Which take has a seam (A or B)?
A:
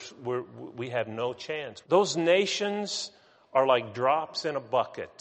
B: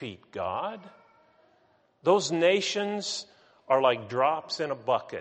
A